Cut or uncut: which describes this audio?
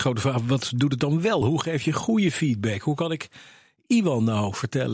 uncut